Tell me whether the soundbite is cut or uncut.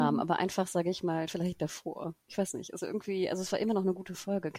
cut